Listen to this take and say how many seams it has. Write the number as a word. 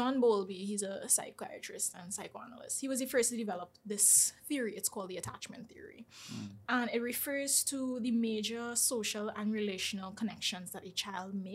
zero